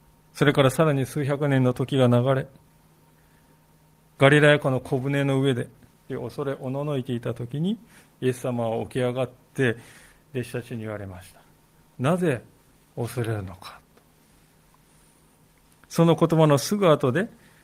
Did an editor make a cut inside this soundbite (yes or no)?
yes